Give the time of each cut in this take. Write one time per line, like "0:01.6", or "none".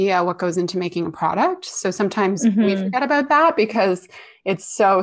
none